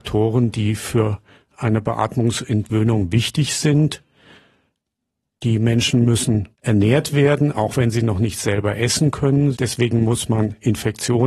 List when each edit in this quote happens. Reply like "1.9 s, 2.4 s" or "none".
6.5 s, 9.5 s

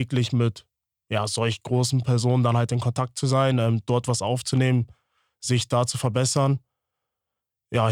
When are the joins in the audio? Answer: none

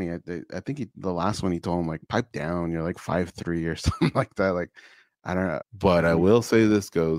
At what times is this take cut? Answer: 5.6 s

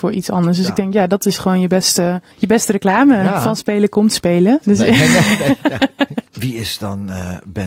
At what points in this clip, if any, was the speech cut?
2.3 s, 4.6 s

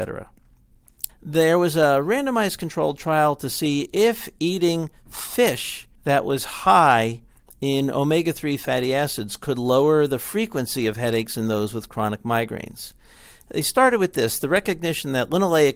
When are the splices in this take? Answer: 1.1 s, 5.9 s

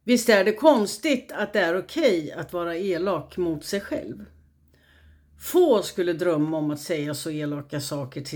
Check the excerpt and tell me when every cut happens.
none

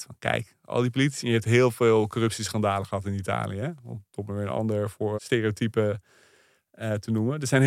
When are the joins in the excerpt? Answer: 5.1 s

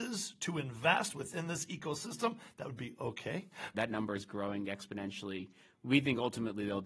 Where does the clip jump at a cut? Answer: 3.7 s

